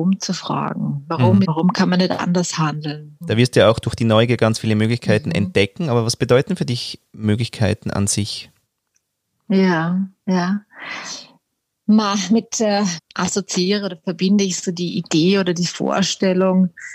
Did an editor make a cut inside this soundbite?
yes; 3 cuts; at 1.4 s, 3.2 s, 13.0 s

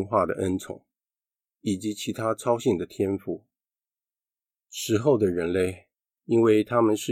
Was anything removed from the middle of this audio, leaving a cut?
yes; 2 cuts; at 4.5 s, 6.2 s

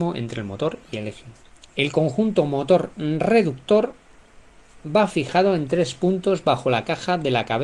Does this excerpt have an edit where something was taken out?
yes; 1 cut; at 1.7 s

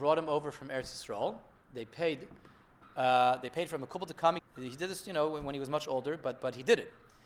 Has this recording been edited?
yes; 1 cut; at 4.4 s

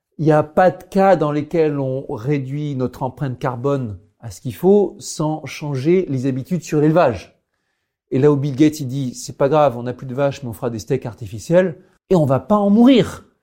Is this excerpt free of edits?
no; 1 cut; at 12.0 s

